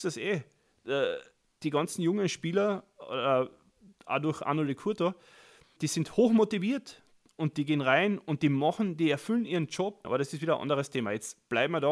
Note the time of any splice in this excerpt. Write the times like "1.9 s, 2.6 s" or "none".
5.8 s, 10.0 s